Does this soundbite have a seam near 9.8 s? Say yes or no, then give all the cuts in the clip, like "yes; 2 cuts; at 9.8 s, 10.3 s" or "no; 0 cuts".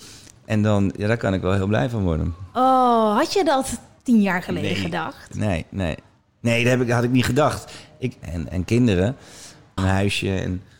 yes; 2 cuts; at 8.2 s, 9.8 s